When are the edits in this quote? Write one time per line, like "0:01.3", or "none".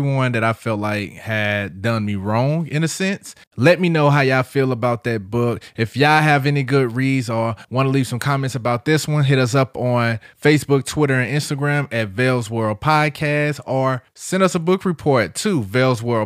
0:03.4